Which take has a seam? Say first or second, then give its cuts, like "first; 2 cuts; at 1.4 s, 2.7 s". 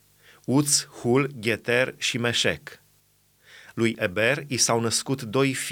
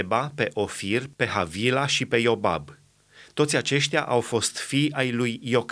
first; 1 cut; at 3.7 s